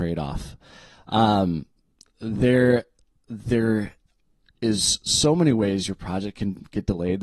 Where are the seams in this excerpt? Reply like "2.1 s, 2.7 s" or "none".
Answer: none